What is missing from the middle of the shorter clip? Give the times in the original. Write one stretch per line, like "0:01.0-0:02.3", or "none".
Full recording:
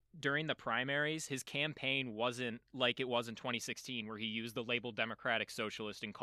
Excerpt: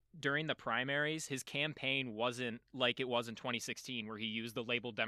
none